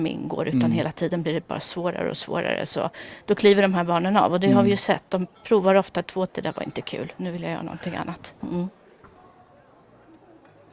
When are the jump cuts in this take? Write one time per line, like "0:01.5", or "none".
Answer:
0:06.3
0:08.4